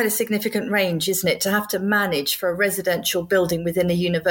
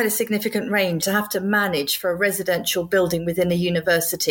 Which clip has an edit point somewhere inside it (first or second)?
second